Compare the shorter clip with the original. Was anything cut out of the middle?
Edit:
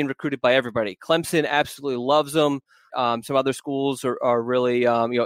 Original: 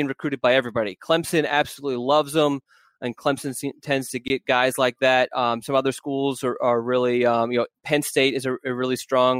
yes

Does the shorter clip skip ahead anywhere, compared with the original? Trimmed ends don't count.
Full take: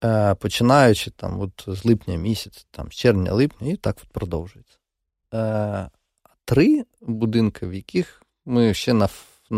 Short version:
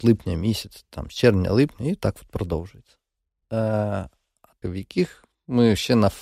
yes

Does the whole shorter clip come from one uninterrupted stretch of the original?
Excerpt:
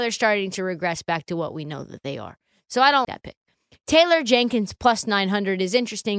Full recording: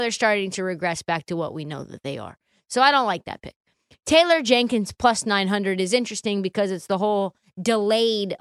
no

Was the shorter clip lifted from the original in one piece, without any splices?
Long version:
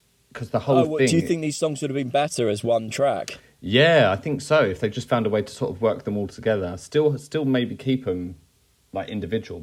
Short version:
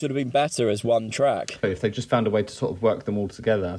no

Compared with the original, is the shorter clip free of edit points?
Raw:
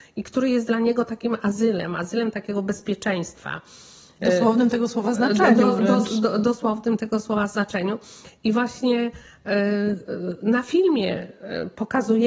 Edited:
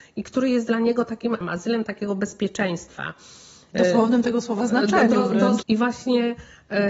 no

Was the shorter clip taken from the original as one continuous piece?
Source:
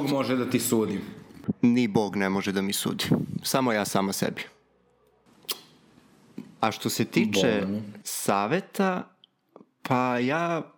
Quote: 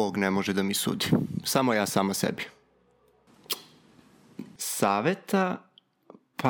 no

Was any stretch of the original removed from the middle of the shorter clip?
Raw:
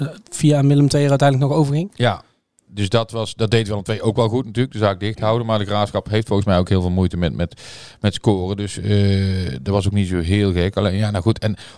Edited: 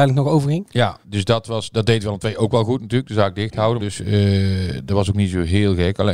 yes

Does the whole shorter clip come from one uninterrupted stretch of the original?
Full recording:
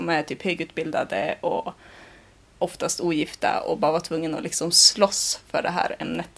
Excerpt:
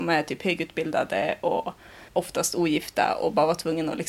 no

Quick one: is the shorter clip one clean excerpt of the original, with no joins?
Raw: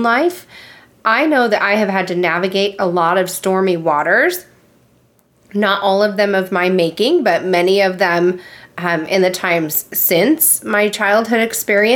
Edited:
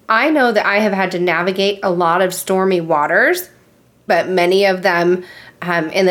no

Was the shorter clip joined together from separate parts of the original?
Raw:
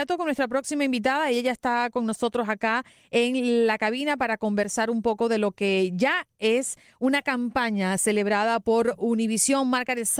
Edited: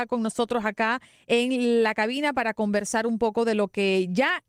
no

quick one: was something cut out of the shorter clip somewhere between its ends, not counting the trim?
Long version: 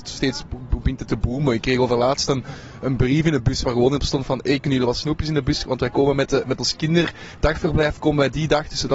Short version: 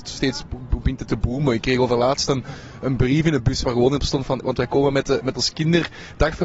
yes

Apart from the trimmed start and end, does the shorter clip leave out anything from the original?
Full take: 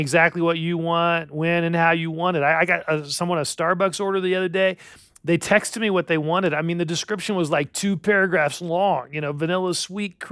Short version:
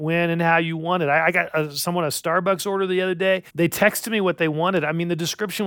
yes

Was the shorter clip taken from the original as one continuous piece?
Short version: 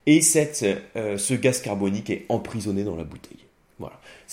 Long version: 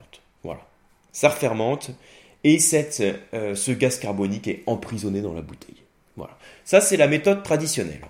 yes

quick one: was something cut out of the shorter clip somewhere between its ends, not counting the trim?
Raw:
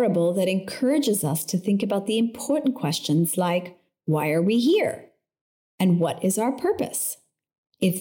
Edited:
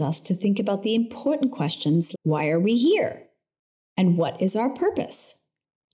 yes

